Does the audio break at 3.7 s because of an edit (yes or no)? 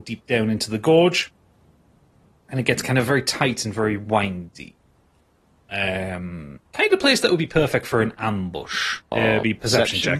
no